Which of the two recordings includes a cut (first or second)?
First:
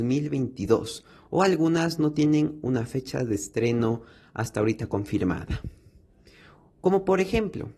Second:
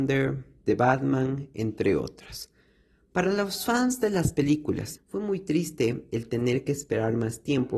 second